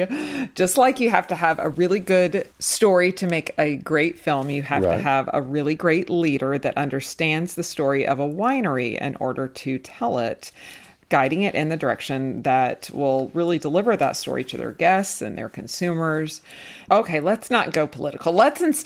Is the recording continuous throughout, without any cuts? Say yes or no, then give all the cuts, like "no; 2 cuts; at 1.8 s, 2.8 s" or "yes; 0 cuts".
no; 2 cuts; at 2.5 s, 16.9 s